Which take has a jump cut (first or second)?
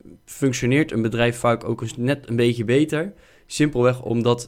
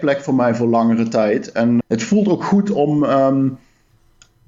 second